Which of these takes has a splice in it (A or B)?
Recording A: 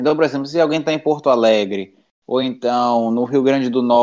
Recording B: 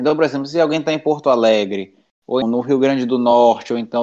B